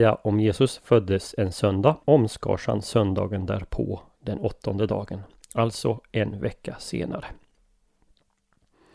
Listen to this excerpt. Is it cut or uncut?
cut